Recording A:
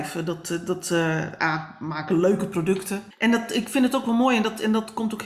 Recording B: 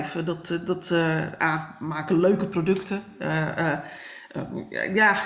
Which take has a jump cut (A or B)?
A